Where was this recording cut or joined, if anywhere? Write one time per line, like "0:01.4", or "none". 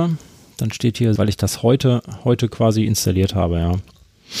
0:01.2